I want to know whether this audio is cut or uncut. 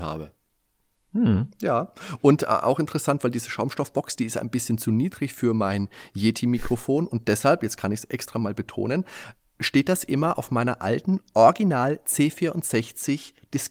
uncut